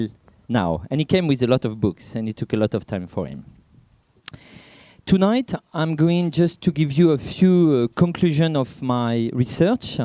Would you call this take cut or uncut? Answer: uncut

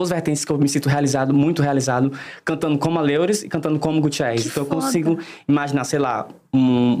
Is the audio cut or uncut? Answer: uncut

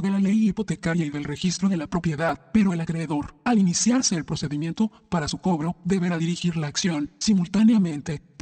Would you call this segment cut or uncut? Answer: uncut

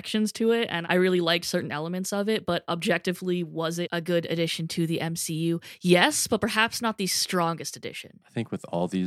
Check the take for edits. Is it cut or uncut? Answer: uncut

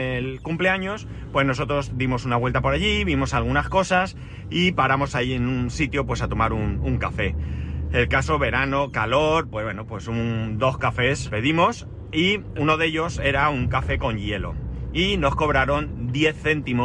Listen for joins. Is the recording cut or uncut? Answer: cut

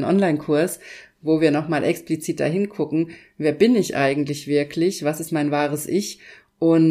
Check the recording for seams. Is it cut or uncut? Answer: uncut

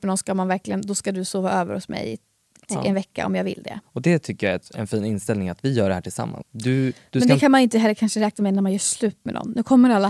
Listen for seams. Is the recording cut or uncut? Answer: cut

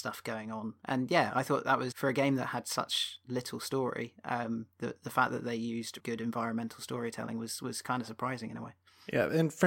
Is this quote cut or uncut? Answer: cut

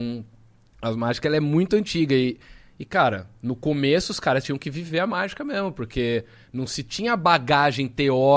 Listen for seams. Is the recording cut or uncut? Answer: uncut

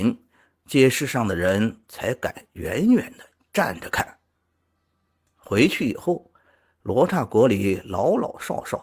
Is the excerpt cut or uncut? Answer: uncut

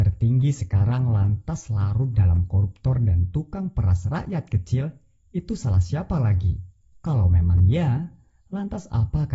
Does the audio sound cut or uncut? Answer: cut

